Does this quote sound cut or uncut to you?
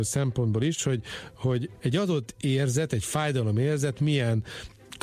uncut